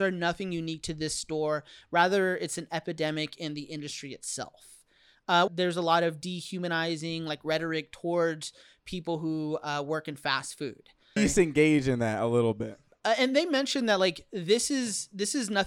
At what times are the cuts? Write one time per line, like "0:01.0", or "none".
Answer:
0:05.5
0:11.2
0:12.9